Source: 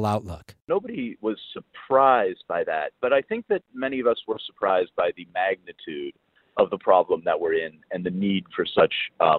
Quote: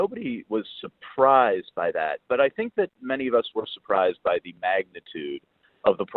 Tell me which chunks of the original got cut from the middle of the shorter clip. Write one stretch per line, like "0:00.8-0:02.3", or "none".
none